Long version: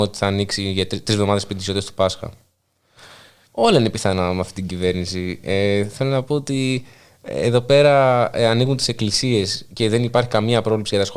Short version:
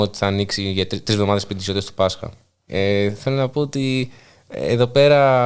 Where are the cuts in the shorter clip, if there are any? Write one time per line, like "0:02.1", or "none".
0:02.7